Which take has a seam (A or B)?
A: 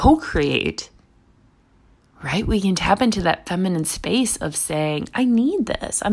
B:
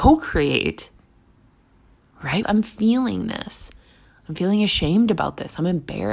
B